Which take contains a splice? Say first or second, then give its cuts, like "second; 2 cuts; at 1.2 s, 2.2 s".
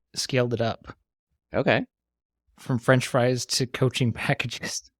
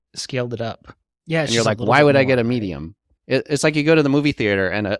second; 2 cuts; at 1.1 s, 3.2 s